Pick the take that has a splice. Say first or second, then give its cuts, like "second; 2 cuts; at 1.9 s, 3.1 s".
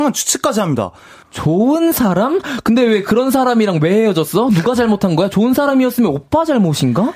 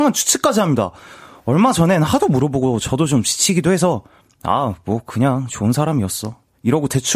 first; 1 cut; at 1.2 s